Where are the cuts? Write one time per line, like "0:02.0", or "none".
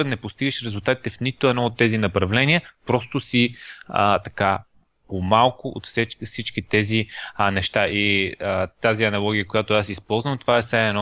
none